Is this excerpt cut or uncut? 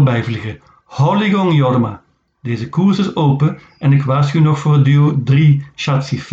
uncut